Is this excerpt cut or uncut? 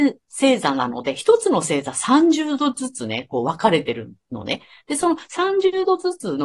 uncut